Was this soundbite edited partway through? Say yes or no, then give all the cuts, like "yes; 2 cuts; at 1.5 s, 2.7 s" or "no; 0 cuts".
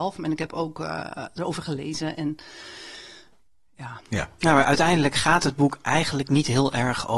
no; 0 cuts